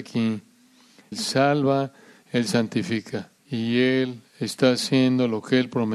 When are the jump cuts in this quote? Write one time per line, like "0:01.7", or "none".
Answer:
0:01.1
0:03.4

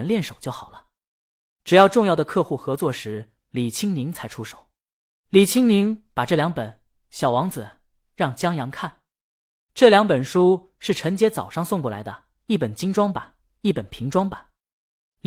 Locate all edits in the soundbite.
none

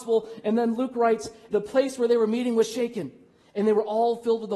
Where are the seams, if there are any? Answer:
0:01.5

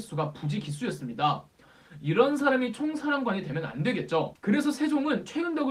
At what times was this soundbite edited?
none

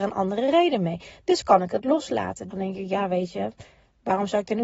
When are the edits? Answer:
0:02.5

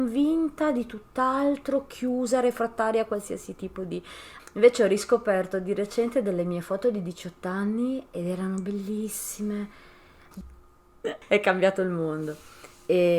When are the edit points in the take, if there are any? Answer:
0:04.4
0:10.3

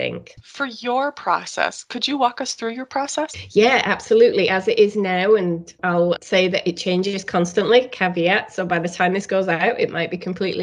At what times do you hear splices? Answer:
none

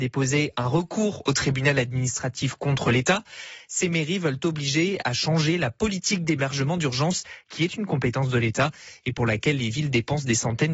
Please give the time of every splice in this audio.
none

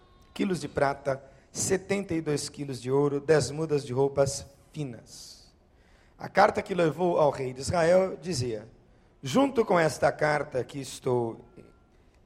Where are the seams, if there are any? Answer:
none

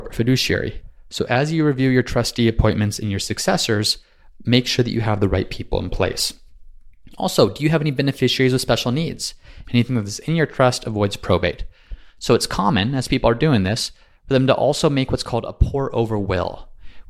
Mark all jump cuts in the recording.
0:01.0
0:09.6

